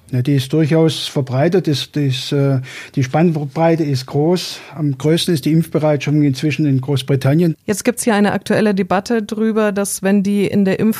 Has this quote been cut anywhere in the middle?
yes; 1 cut; at 7.5 s

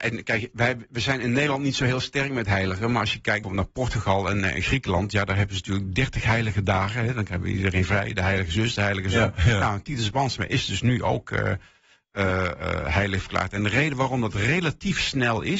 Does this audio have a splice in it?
yes; 1 cut; at 3.4 s

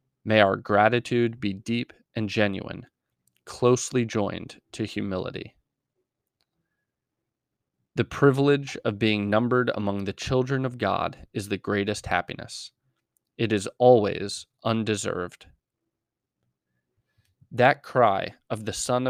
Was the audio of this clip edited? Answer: no; 0 cuts

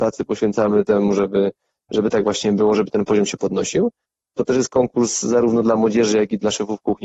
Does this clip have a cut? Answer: no; 0 cuts

